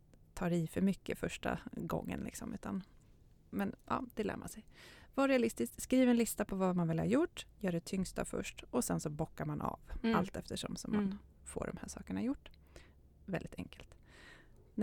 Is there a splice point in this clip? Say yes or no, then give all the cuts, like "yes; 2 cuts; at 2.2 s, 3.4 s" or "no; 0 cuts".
no; 0 cuts